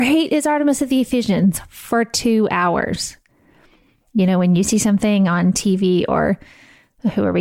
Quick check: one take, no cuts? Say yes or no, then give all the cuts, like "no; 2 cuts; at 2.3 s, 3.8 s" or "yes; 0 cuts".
yes; 0 cuts